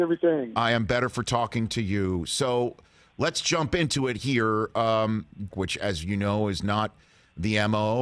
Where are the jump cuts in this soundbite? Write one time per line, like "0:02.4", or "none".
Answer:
0:05.5